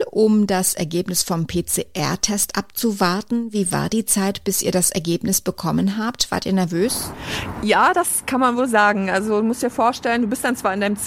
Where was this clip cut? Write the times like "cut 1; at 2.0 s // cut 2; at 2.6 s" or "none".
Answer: none